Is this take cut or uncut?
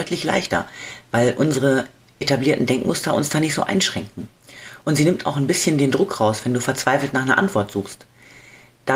uncut